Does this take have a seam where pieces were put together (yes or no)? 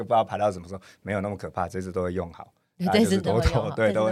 no